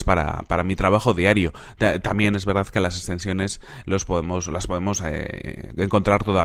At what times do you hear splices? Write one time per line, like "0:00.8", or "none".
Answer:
none